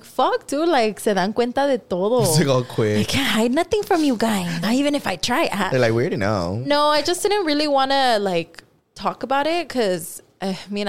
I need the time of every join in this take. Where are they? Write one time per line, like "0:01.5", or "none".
0:04.6